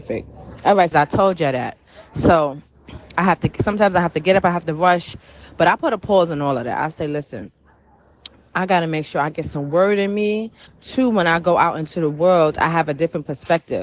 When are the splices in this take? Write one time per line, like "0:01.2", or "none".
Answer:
0:00.9
0:10.7